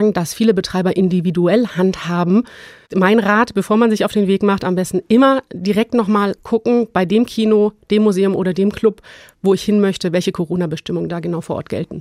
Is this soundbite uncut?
yes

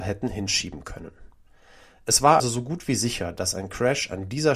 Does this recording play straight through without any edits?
no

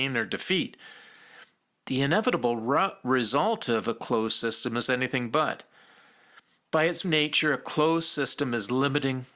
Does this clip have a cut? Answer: yes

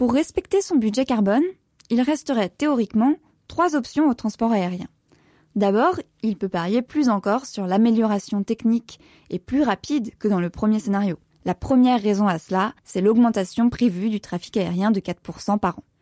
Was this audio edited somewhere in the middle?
yes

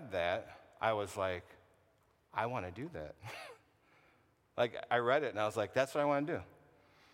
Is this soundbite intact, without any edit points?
yes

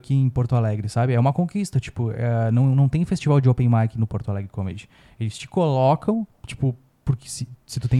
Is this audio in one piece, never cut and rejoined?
no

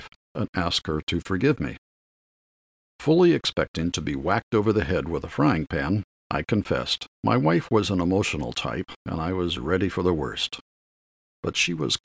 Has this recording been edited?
yes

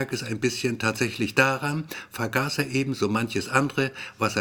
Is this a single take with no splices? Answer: yes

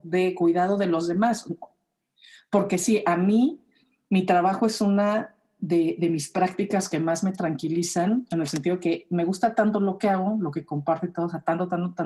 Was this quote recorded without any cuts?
yes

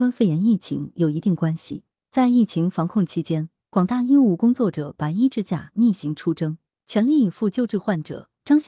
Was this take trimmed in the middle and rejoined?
no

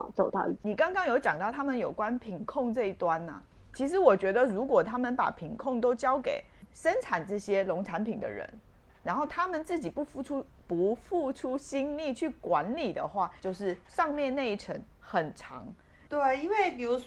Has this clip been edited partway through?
yes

